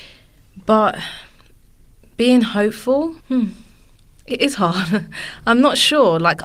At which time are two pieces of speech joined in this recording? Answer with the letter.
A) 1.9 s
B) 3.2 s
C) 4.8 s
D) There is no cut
B